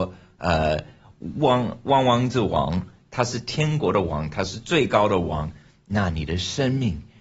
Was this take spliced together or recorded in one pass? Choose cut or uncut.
uncut